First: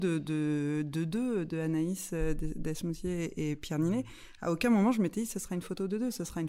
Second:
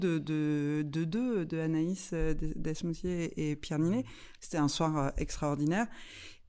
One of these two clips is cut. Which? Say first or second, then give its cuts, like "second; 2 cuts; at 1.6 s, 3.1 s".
second; 1 cut; at 4.4 s